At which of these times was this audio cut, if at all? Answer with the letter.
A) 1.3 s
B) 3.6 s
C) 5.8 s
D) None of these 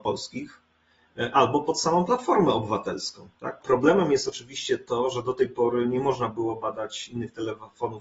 B